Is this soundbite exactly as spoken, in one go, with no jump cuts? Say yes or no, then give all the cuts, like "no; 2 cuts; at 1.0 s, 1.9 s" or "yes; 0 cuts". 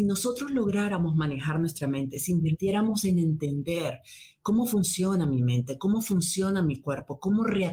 yes; 0 cuts